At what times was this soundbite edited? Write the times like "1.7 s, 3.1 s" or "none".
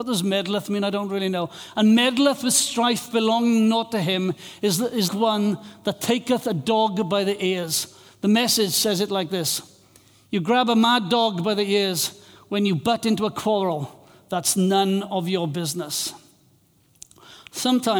5.1 s